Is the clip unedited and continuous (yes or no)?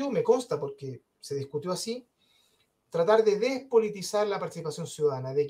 yes